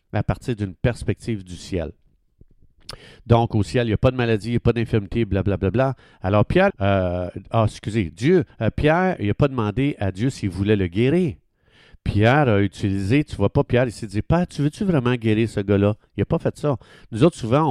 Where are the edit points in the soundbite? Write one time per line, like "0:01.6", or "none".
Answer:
0:06.7

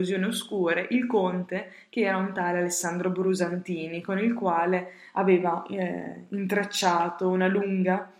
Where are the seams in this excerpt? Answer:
none

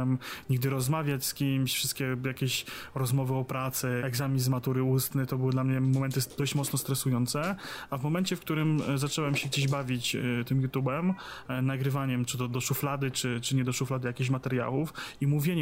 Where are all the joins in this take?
0:04.0
0:12.3

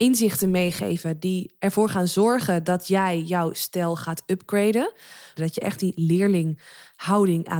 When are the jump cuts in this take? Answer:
0:05.4

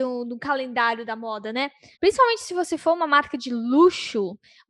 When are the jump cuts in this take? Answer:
0:01.9

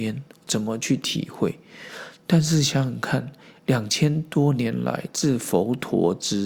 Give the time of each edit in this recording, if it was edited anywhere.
none

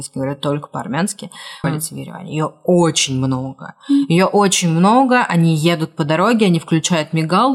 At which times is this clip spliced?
0:01.6

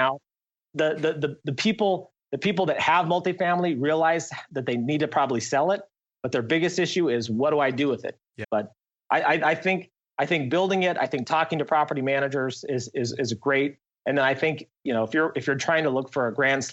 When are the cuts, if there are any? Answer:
0:08.4

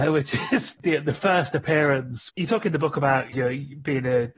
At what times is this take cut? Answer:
0:02.3
0:03.3

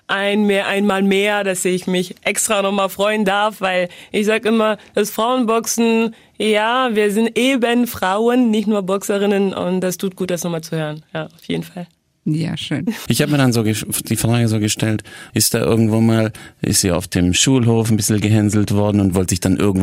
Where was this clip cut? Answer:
0:13.1
0:15.3

